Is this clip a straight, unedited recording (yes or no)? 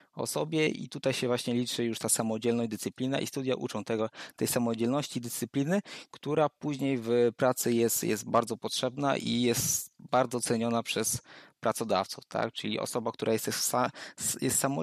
yes